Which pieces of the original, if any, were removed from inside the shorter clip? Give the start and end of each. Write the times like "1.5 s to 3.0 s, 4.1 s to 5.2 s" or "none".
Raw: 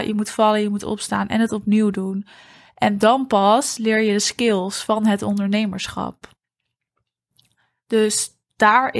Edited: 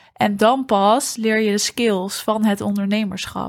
none